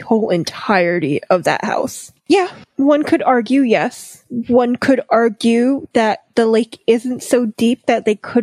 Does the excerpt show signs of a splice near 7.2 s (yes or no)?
no